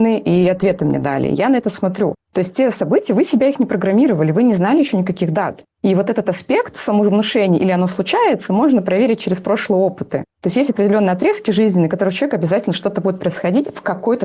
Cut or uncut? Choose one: uncut